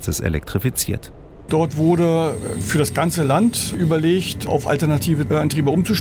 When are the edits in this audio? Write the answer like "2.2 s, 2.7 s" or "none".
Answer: 1.5 s